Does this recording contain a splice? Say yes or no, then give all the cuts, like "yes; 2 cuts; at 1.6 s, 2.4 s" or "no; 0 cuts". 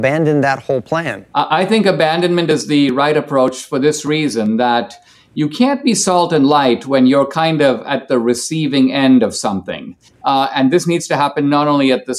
yes; 1 cut; at 10.1 s